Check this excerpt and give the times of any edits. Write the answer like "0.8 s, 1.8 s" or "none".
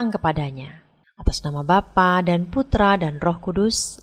1.0 s